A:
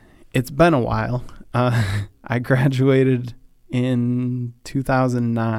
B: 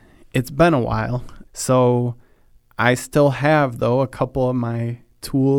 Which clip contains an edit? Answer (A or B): B